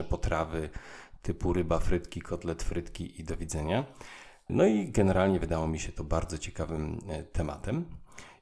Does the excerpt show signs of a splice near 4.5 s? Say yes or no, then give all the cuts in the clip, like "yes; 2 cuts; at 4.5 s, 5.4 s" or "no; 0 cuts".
yes; 1 cut; at 4.5 s